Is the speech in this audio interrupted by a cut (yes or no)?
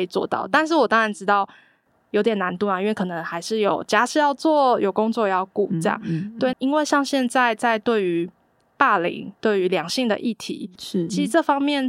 yes